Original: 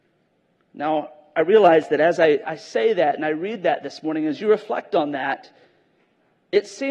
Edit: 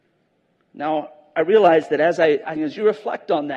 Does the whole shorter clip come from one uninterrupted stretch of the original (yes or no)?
no